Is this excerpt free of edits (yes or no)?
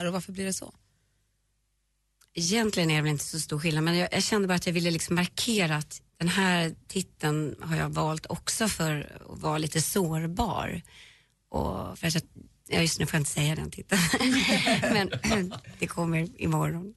no